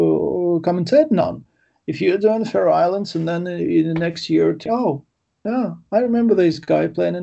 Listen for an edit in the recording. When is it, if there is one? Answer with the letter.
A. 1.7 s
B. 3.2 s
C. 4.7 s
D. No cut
C